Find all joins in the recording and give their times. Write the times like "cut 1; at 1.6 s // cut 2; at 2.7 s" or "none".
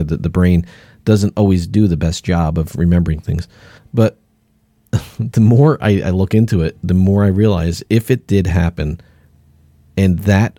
cut 1; at 3.8 s